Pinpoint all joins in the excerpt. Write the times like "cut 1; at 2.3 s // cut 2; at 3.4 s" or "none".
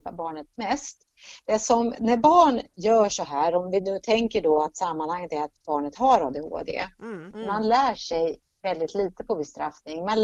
cut 1; at 1.9 s // cut 2; at 7.3 s